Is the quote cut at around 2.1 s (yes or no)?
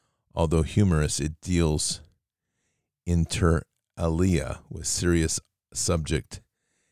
no